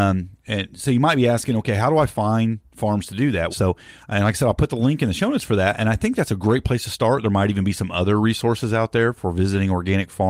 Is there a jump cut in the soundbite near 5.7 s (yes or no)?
no